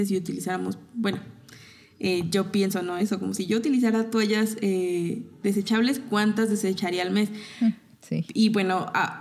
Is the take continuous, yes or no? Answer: yes